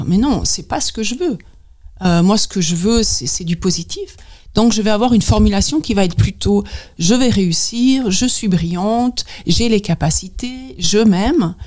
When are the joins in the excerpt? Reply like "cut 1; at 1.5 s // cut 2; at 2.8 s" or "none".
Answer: none